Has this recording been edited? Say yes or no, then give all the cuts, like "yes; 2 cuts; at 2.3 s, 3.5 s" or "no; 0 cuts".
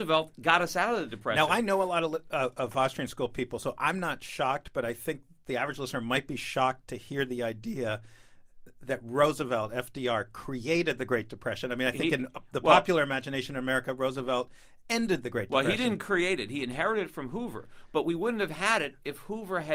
no; 0 cuts